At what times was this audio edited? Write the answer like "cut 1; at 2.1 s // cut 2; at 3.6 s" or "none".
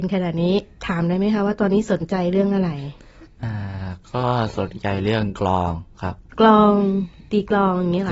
cut 1; at 6.3 s